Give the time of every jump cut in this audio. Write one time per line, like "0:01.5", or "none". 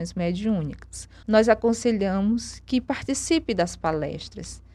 0:01.2

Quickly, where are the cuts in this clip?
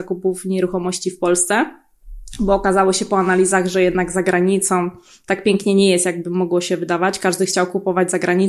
none

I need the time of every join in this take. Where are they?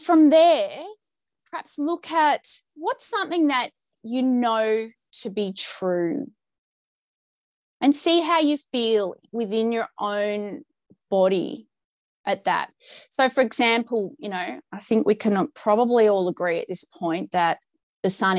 none

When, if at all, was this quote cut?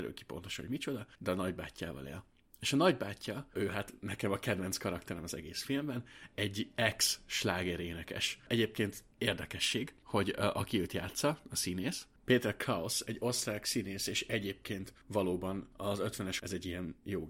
0:16.4

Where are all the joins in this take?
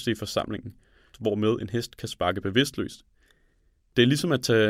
0:01.1

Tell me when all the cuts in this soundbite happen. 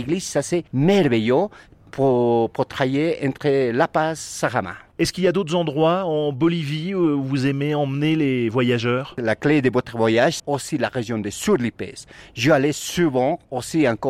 0:10.4

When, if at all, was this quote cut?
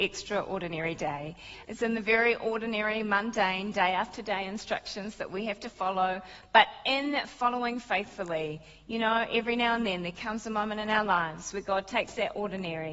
0:01.6

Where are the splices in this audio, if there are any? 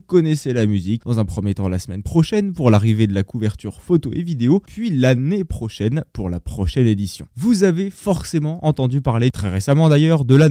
0:01.0

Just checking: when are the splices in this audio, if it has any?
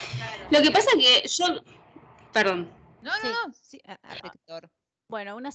0:04.2

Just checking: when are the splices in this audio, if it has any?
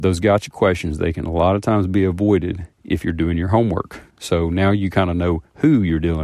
0:04.1

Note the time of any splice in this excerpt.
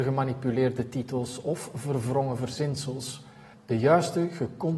0:03.5

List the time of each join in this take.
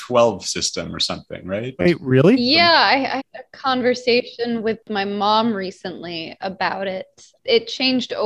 0:03.2

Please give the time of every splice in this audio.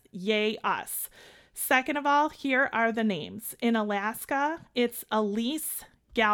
none

